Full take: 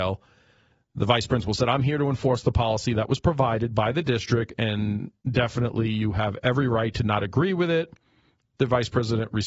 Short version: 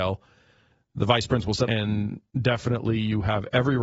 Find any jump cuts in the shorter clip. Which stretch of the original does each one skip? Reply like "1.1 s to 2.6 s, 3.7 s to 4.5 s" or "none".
1.6 s to 4.6 s